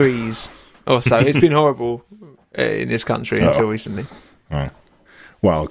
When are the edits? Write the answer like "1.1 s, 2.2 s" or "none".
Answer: none